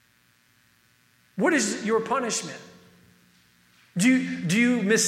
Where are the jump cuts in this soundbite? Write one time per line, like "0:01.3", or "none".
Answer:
none